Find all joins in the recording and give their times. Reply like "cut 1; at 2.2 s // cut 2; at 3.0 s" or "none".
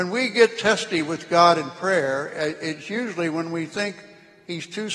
none